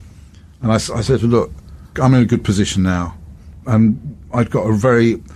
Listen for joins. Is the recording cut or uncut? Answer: cut